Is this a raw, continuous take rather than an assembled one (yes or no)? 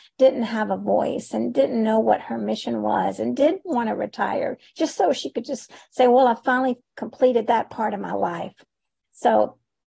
yes